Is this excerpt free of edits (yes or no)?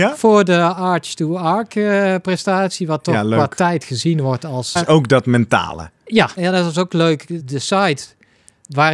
no